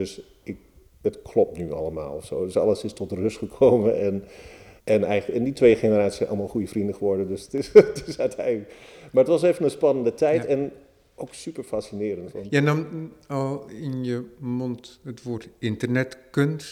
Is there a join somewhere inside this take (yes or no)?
yes